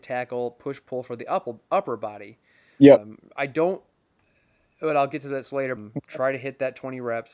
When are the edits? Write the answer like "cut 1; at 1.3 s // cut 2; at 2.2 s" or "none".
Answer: cut 1; at 3.0 s // cut 2; at 5.8 s